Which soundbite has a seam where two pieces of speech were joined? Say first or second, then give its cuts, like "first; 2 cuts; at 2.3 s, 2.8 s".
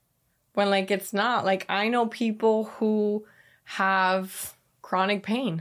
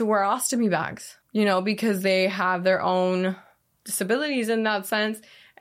second; 1 cut; at 1.2 s